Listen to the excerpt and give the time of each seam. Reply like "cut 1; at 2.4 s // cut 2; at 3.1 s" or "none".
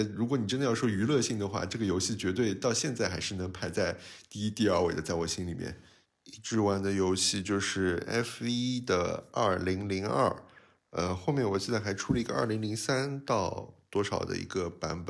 cut 1; at 6.1 s